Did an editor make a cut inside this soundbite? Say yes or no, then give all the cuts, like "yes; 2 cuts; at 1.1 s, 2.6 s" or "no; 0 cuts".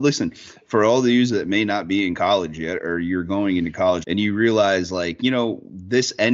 yes; 1 cut; at 4.0 s